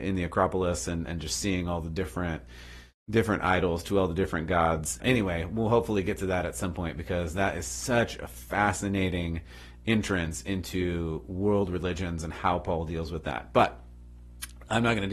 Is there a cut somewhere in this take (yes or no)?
yes